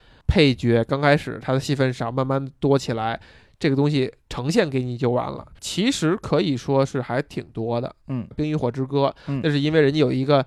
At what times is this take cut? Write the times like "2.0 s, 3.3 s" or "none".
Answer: 5.5 s, 8.3 s